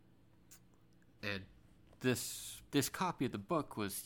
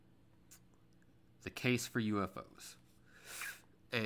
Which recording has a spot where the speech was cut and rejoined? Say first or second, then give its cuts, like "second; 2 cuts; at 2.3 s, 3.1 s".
first; 2 cuts; at 1.2 s, 2.7 s